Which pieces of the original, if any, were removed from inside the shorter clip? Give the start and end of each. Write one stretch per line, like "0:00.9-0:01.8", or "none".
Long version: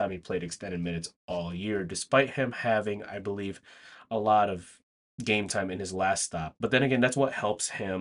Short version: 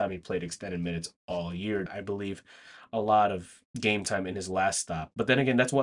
0:01.9-0:03.0
0:04.9-0:05.1